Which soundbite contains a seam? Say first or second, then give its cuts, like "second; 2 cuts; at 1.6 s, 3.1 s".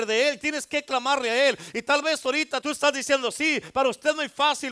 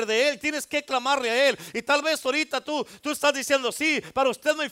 first; 1 cut; at 2.6 s